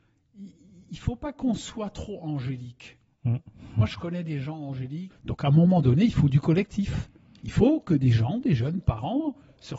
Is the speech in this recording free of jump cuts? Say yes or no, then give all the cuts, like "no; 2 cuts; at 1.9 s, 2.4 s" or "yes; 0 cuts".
no; 1 cut; at 5.1 s